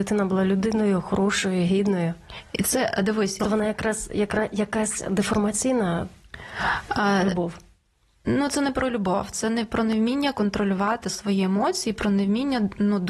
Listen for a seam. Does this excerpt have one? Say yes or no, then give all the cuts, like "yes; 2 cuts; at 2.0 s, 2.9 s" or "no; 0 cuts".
yes; 1 cut; at 3.4 s